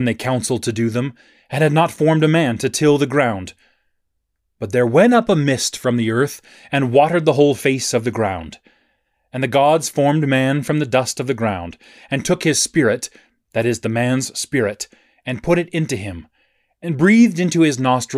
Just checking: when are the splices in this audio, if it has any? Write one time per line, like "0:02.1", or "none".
none